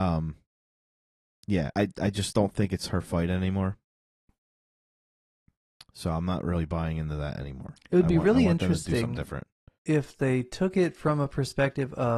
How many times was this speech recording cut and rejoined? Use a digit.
1